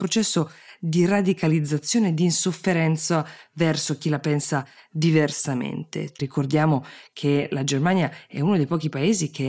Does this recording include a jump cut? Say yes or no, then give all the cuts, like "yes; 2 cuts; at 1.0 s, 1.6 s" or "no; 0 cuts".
yes; 1 cut; at 6.2 s